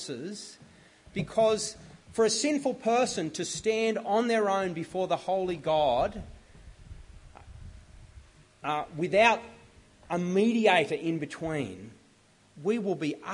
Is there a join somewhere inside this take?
no; 0 cuts

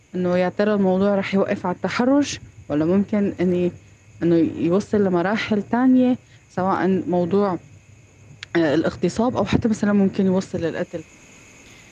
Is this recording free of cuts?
yes; 0 cuts

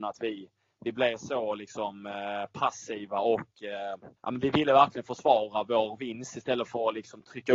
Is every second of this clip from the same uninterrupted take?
no; 1 cut; at 4.2 s

